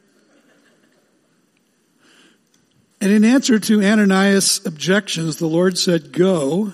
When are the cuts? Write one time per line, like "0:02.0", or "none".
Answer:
0:02.9